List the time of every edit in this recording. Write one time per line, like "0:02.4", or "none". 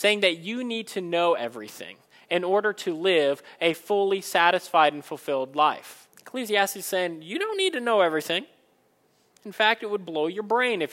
0:06.1